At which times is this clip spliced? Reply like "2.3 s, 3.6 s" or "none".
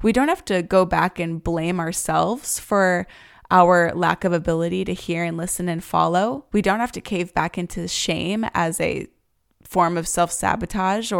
none